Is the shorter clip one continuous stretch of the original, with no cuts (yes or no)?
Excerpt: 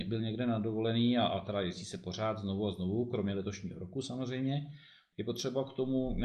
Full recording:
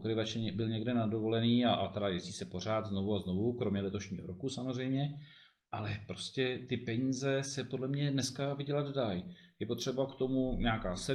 no